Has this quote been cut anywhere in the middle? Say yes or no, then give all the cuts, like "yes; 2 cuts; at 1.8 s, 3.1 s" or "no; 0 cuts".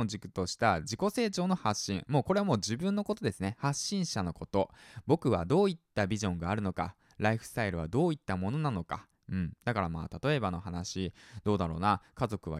no; 0 cuts